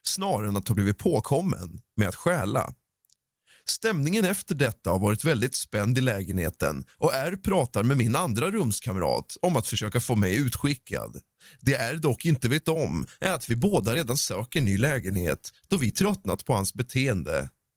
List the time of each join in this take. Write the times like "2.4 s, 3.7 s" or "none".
none